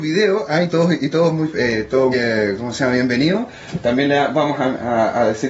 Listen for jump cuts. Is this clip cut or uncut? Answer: cut